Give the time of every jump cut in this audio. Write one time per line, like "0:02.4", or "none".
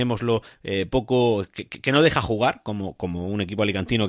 none